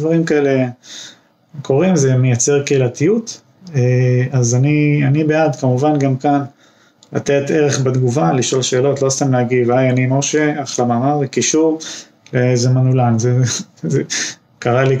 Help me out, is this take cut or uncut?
uncut